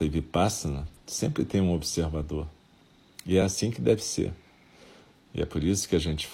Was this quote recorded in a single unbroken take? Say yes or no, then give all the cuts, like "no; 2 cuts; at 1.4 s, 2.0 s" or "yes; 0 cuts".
yes; 0 cuts